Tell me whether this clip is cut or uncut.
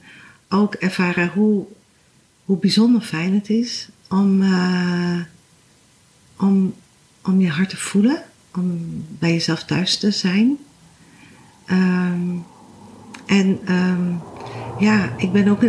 uncut